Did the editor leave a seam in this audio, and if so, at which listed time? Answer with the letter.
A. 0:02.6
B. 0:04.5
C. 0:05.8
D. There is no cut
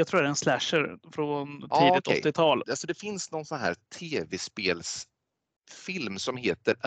A